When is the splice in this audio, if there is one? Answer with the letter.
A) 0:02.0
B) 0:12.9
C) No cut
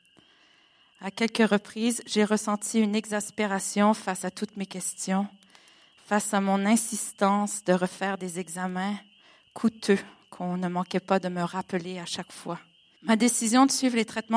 B